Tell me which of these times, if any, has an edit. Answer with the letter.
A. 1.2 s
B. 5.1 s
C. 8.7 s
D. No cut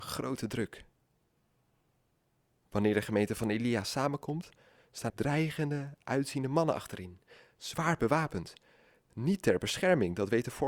B